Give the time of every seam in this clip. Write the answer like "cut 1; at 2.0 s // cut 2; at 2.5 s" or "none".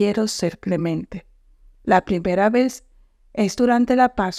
cut 1; at 1.7 s